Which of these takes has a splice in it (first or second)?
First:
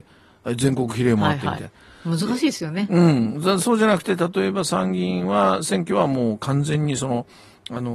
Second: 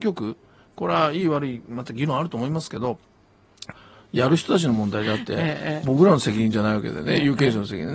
second